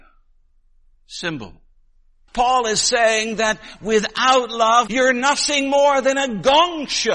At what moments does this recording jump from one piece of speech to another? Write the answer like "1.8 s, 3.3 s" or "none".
2.3 s, 4.9 s